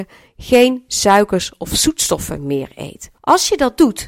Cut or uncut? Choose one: cut